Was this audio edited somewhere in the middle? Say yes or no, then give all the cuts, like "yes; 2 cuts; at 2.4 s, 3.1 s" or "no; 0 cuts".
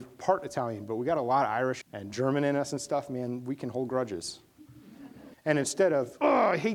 yes; 2 cuts; at 1.8 s, 5.3 s